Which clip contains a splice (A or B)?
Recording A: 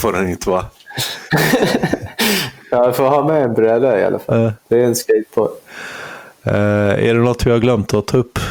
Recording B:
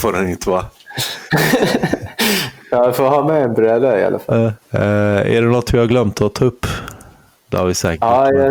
B